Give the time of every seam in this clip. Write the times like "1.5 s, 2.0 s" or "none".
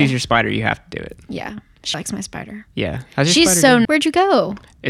1.9 s, 3.8 s